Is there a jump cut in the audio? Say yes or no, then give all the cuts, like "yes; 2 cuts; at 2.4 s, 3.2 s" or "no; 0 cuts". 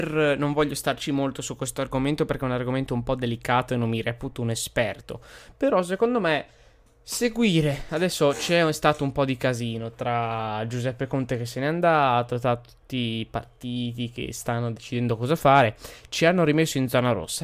no; 0 cuts